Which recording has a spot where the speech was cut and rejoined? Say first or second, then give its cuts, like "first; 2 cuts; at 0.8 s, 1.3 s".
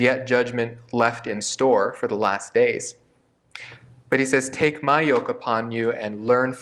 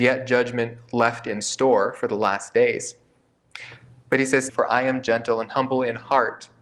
second; 1 cut; at 4.5 s